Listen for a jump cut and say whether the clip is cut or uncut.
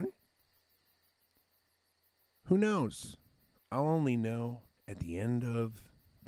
uncut